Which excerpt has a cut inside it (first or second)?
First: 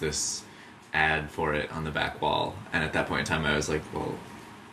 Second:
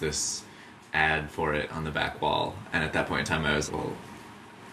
second